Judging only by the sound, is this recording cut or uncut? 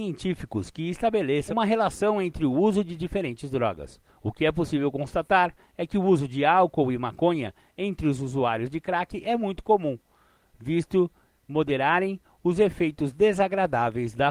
uncut